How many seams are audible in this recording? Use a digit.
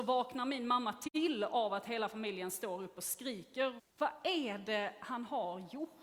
1